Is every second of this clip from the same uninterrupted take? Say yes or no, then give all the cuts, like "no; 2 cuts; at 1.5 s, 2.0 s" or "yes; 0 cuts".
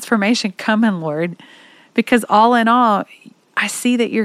yes; 0 cuts